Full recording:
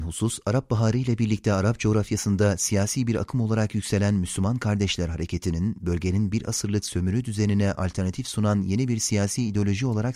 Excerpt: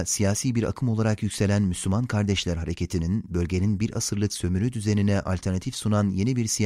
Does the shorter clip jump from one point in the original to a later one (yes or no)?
no